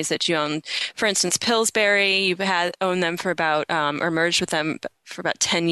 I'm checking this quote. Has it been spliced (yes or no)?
no